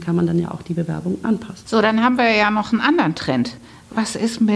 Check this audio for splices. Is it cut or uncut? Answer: uncut